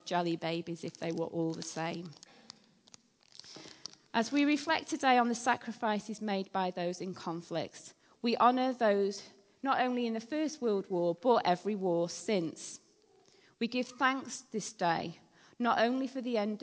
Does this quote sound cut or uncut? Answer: uncut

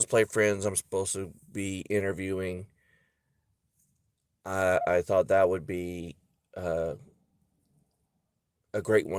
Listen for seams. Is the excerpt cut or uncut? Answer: uncut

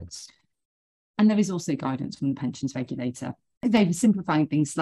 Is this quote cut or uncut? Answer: cut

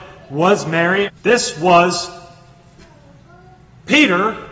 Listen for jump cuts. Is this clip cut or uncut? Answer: cut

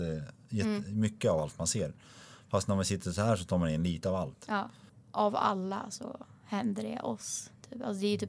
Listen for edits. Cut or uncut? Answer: uncut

